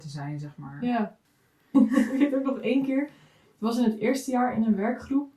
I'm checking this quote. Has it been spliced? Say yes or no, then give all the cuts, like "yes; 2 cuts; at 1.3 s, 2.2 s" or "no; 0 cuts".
yes; 1 cut; at 1.7 s